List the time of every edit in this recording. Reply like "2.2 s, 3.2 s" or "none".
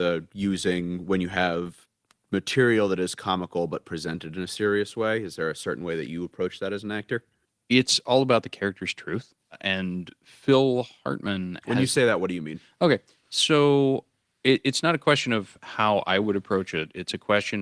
none